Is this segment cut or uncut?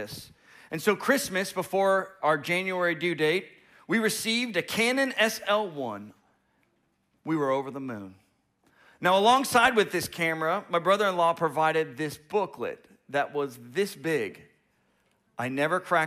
uncut